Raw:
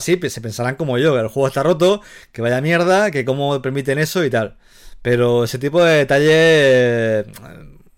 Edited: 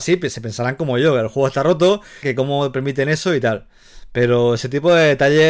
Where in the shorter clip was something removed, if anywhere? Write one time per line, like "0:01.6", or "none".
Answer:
0:02.2